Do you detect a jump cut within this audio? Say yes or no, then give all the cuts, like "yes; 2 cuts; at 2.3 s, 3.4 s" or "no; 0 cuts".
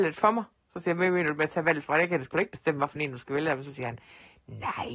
no; 0 cuts